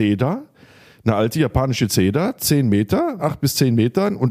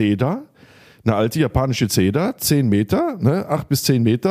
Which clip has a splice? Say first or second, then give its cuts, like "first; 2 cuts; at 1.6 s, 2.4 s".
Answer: first; 1 cut; at 3.2 s